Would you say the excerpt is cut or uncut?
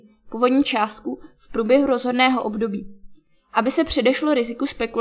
uncut